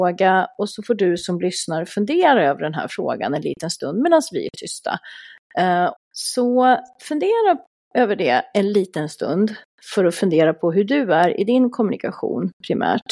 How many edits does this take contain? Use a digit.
1